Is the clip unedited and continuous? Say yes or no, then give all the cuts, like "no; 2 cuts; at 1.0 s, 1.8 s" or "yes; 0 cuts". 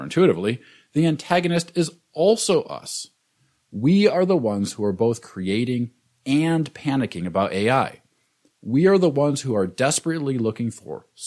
yes; 0 cuts